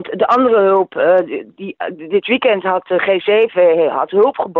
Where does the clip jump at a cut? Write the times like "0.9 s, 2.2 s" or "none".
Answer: none